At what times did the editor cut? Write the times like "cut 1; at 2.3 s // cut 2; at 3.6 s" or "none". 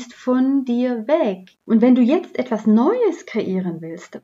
cut 1; at 1.6 s